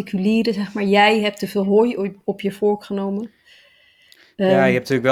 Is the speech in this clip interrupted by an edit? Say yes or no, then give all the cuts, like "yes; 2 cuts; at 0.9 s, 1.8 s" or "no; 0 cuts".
no; 0 cuts